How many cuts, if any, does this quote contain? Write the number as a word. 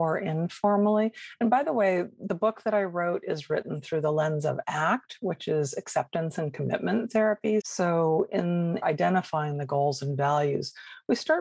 two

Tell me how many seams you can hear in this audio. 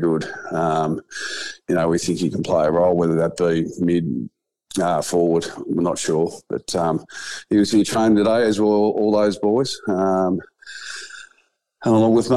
zero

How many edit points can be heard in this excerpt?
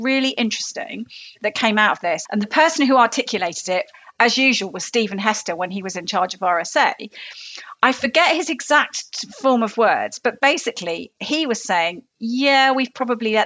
one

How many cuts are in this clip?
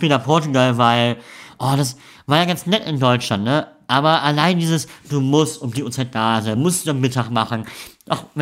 zero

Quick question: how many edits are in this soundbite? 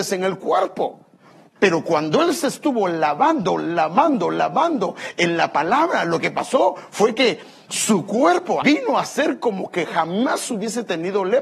two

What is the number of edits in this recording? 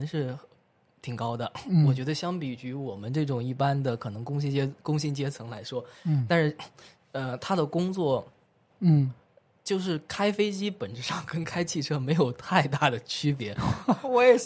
one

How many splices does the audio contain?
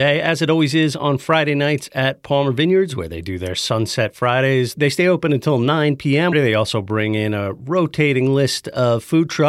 one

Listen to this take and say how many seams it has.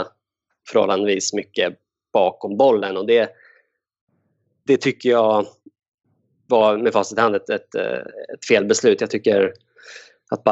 zero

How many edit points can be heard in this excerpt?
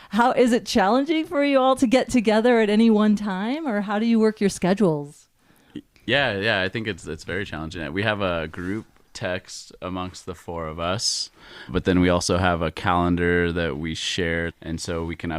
two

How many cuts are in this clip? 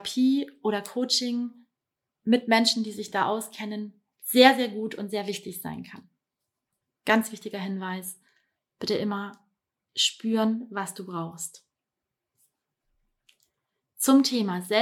zero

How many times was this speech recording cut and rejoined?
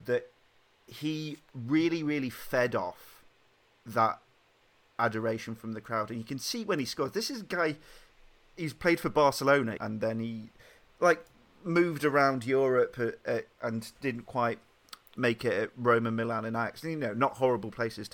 one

